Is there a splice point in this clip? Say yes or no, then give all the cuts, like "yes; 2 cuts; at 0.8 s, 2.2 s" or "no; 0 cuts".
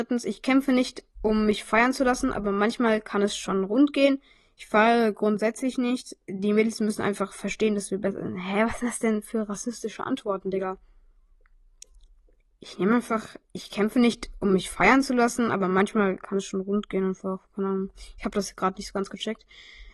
no; 0 cuts